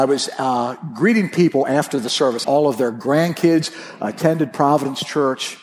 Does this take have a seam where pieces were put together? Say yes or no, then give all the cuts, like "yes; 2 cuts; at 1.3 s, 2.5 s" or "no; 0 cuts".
yes; 1 cut; at 2.4 s